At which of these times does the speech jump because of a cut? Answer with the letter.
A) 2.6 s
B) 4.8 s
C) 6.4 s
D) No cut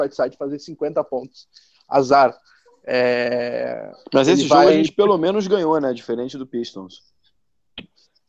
D